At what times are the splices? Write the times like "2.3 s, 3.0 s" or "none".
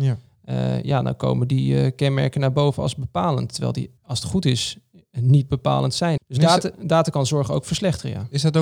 4.0 s, 6.2 s

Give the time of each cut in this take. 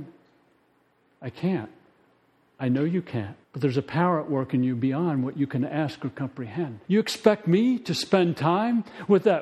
3.4 s, 6.9 s

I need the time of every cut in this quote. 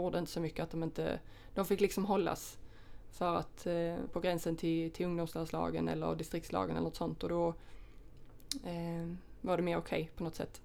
4.1 s

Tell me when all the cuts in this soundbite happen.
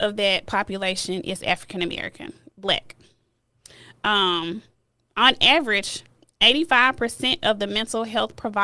none

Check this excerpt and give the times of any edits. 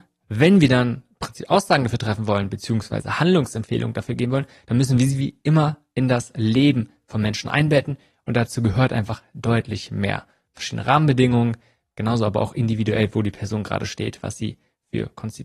none

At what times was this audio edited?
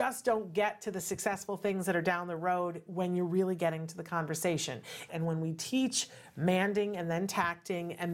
5.1 s

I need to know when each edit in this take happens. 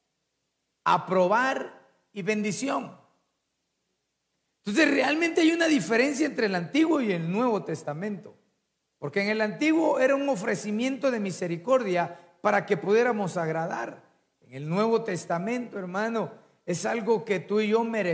none

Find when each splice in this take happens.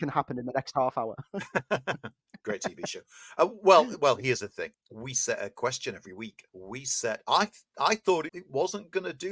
6.5 s, 8.3 s

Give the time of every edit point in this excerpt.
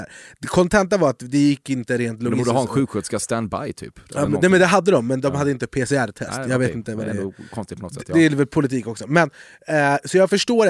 none

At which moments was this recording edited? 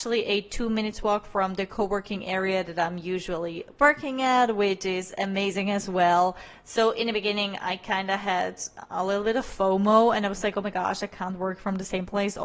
none

